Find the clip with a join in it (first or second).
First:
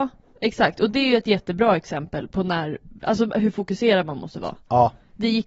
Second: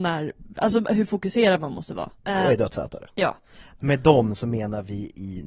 second